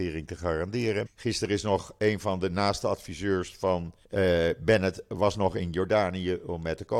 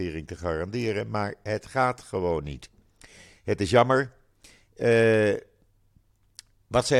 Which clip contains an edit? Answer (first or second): first